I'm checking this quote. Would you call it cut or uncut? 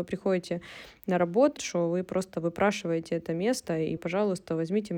cut